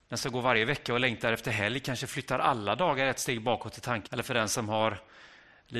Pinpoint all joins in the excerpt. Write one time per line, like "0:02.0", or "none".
0:04.1